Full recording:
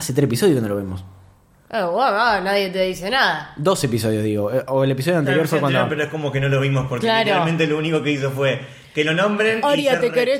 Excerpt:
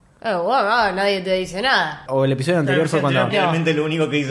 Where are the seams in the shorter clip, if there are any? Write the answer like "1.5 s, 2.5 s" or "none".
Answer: 2.1 s, 3.3 s